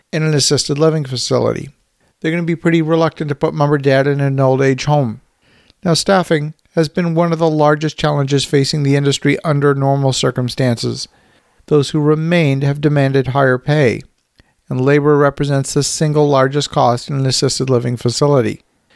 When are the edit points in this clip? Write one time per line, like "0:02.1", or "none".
0:02.1
0:11.6

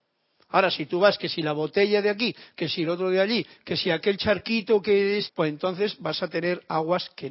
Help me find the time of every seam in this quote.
0:05.3

